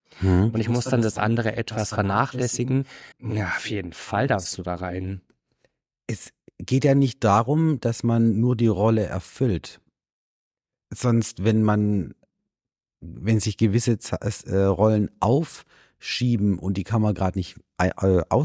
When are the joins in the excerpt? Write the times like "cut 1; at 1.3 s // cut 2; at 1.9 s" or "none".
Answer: cut 1; at 3.1 s